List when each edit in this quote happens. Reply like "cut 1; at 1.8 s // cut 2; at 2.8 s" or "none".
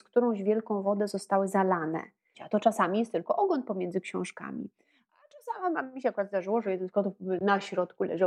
cut 1; at 2.3 s

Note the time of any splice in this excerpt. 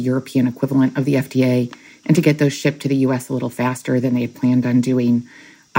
none

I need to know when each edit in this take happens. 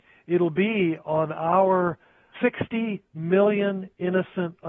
cut 1; at 2.3 s

